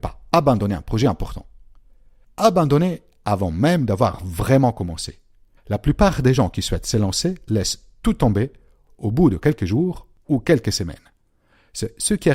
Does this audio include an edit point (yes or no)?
no